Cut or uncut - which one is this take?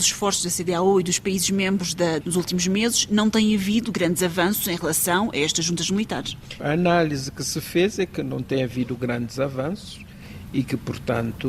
cut